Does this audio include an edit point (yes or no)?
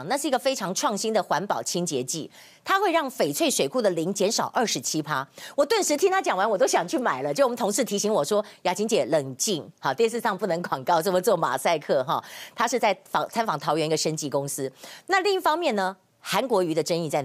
no